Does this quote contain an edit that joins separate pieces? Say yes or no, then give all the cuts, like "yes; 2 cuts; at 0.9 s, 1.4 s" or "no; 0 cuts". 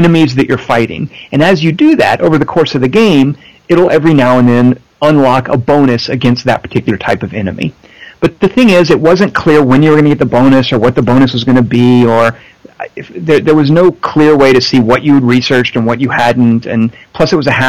no; 0 cuts